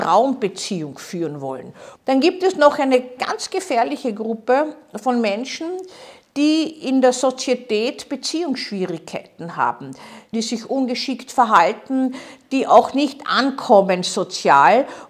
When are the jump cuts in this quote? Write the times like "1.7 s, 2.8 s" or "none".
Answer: 2.0 s, 10.3 s, 12.4 s